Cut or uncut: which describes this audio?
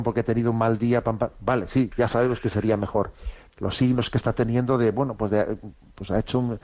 cut